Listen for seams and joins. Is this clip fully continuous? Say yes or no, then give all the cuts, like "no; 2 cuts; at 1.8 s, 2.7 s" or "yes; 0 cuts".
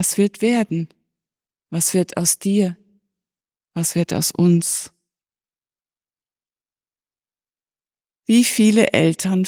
yes; 0 cuts